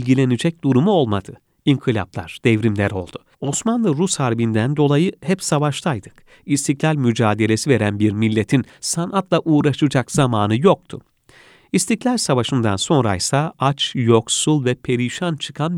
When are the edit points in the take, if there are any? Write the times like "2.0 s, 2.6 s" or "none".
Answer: 3.3 s